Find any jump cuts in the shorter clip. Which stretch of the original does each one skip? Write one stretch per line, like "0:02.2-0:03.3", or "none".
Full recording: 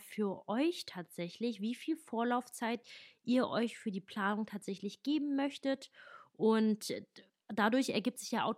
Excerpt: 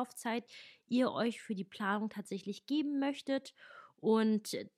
none